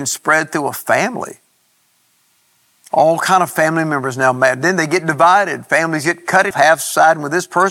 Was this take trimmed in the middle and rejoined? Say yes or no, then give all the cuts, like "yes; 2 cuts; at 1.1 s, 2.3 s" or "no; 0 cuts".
yes; 1 cut; at 6.5 s